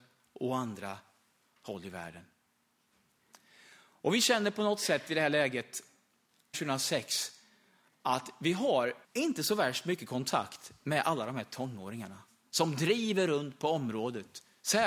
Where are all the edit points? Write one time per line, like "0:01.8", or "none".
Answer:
0:06.5
0:09.0